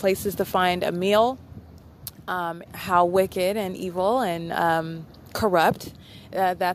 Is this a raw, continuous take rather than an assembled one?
no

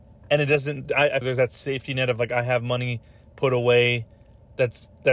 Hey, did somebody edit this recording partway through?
yes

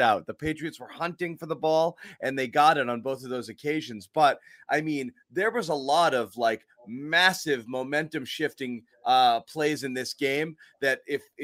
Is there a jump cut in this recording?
no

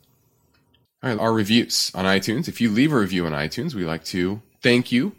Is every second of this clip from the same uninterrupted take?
no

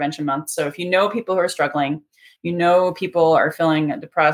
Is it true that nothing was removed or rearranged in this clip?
yes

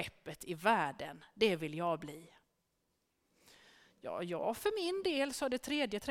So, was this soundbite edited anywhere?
no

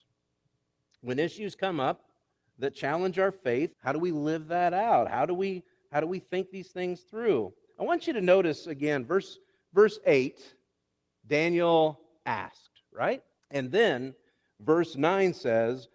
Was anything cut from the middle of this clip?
yes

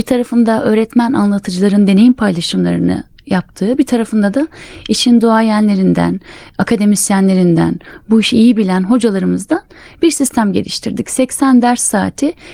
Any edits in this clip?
no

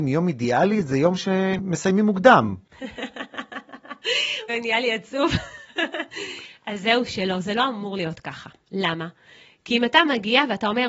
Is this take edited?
yes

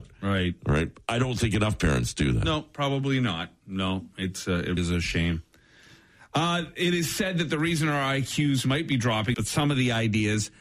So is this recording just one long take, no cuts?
no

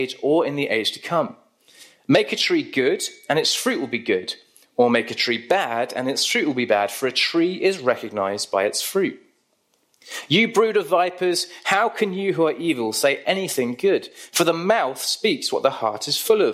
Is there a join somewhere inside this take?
no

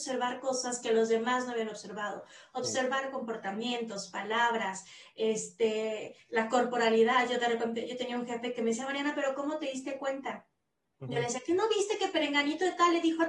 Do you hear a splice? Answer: no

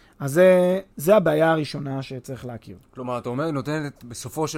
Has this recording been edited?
yes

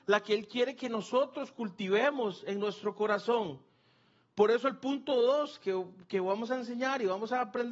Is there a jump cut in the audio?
no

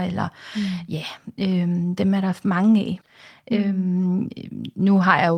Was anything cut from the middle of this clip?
yes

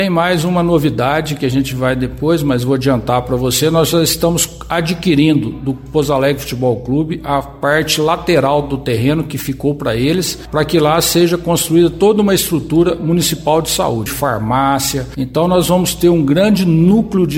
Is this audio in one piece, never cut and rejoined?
no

